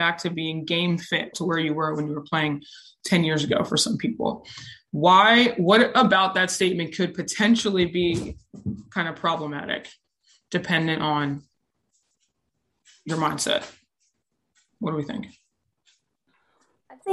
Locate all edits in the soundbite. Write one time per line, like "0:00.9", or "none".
0:01.3